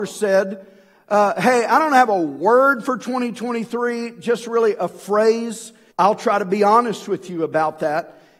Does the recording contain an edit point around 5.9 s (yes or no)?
yes